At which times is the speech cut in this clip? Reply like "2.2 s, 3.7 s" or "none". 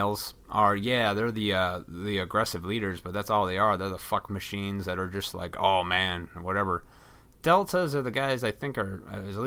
none